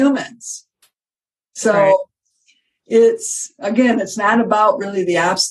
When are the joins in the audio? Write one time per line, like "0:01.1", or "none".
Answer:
none